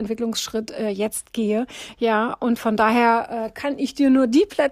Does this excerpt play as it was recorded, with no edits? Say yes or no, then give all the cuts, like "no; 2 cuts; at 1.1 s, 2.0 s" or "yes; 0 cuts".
yes; 0 cuts